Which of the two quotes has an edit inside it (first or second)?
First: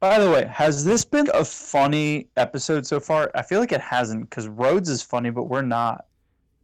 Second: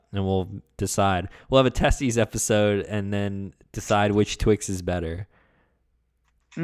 first